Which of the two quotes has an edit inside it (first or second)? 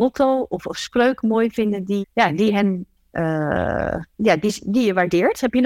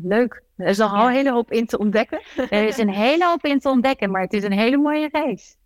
first